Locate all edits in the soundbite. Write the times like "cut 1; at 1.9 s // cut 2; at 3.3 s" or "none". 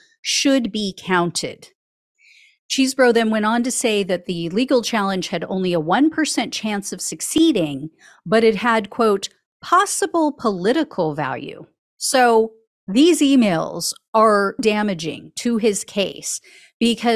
cut 1; at 11.9 s // cut 2; at 14.6 s